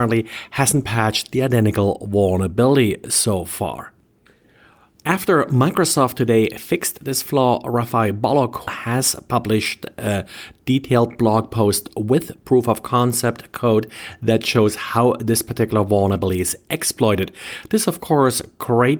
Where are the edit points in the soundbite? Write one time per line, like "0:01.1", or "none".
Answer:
0:08.7